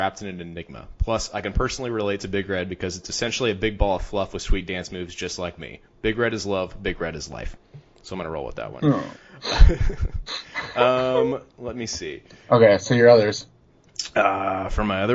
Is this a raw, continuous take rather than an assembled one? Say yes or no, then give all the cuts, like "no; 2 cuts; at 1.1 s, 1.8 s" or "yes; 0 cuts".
yes; 0 cuts